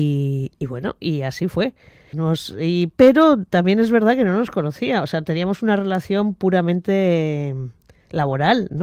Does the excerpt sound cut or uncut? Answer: cut